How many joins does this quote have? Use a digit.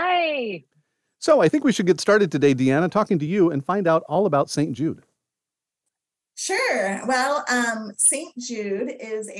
0